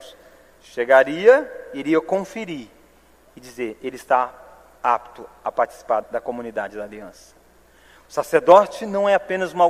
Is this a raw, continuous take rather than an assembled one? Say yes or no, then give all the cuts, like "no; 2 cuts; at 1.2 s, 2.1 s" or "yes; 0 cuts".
no; 1 cut; at 6.0 s